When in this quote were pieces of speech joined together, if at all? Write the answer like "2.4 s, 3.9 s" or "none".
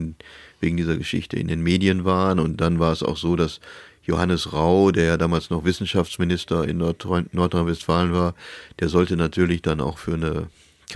none